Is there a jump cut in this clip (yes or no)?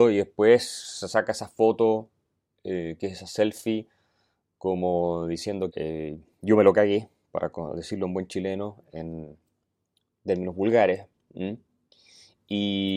yes